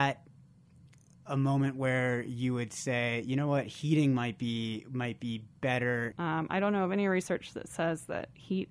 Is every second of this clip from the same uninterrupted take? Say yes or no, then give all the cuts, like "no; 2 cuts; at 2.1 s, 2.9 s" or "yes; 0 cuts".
no; 1 cut; at 6.1 s